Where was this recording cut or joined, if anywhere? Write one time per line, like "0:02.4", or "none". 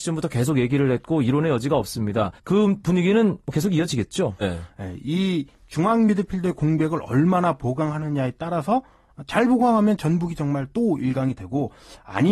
0:02.4
0:04.4